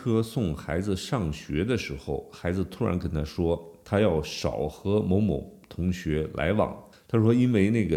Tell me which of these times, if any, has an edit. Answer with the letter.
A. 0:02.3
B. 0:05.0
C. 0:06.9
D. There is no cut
C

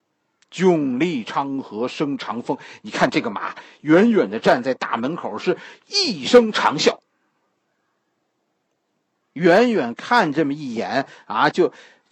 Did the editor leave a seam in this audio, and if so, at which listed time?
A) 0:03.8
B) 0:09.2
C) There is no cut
B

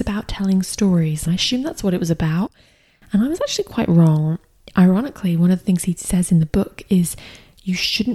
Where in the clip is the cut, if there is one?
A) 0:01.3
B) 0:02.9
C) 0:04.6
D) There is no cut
A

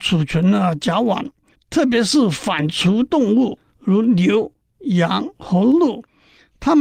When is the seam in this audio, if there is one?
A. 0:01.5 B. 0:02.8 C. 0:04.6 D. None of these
A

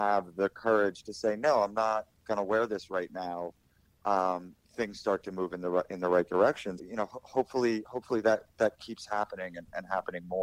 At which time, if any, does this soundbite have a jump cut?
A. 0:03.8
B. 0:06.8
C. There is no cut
B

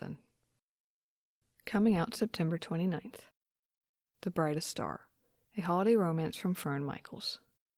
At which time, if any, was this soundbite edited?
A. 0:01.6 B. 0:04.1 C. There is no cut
B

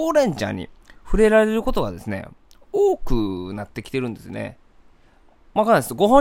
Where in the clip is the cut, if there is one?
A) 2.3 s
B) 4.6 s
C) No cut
C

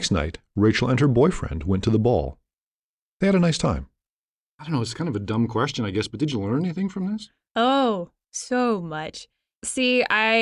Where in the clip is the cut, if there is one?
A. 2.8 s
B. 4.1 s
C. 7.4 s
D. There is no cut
D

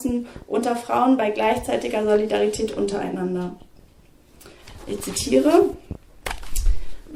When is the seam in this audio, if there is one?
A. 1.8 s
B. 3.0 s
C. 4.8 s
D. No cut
C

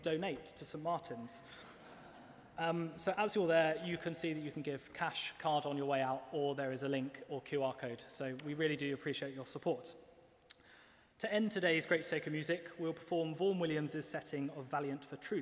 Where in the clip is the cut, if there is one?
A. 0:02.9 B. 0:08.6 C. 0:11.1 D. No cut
D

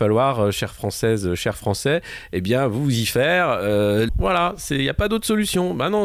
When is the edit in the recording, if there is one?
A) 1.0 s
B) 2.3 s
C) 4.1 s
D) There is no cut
C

